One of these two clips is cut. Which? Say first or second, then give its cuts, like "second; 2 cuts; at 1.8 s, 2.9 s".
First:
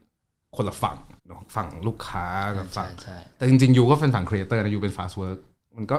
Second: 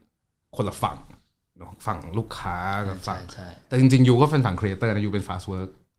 first; 1 cut; at 1.2 s